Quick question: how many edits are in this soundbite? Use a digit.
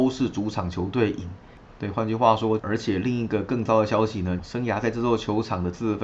2